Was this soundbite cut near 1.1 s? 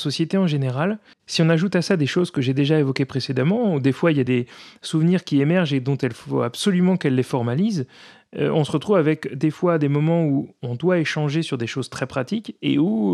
yes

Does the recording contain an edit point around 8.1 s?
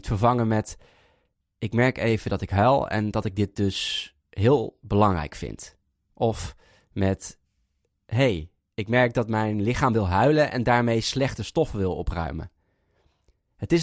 no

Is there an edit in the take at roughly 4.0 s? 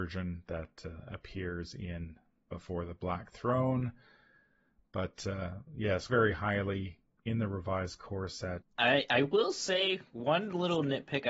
no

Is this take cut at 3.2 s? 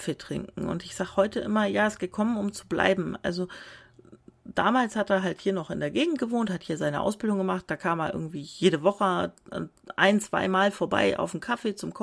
no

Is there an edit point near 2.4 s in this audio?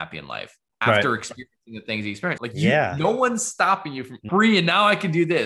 yes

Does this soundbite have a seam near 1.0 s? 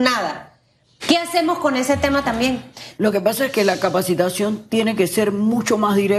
yes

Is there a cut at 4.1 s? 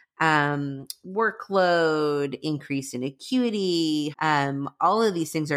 yes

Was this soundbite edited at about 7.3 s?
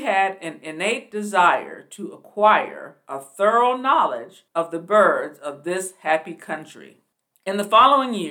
no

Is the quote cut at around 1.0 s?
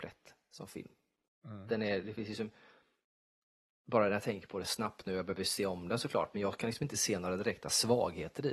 no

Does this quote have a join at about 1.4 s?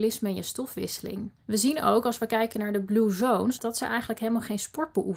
no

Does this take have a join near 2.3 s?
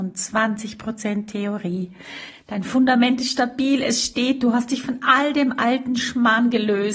yes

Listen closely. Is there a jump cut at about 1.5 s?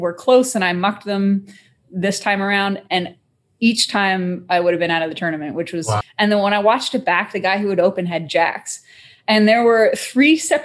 no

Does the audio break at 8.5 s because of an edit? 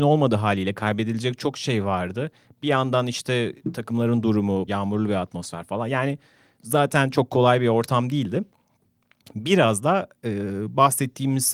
no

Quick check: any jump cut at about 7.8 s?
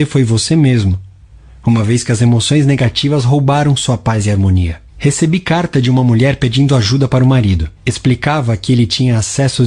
yes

